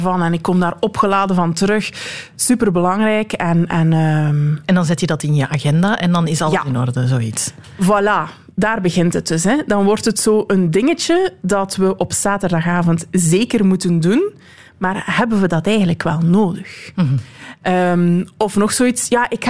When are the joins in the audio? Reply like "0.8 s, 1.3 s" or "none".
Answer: none